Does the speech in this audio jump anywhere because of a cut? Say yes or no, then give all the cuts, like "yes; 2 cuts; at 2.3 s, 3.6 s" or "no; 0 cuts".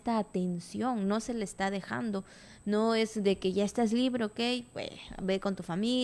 no; 0 cuts